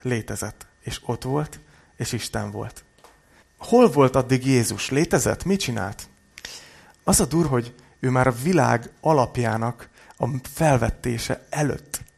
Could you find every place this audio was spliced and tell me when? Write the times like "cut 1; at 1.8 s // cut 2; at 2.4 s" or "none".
cut 1; at 3.4 s // cut 2; at 7.5 s